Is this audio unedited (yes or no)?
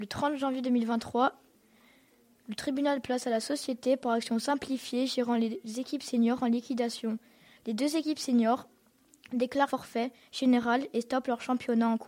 no